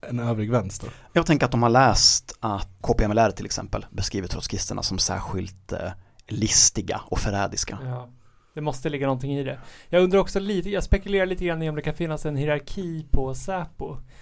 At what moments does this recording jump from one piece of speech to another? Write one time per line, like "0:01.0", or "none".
0:02.8